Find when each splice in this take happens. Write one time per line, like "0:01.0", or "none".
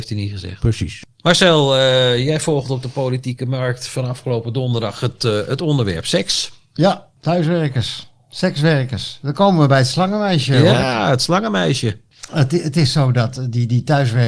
none